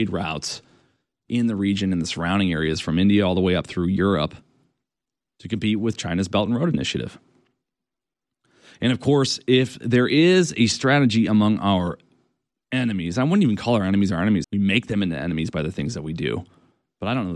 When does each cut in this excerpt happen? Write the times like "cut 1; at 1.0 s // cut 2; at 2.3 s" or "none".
cut 1; at 14.4 s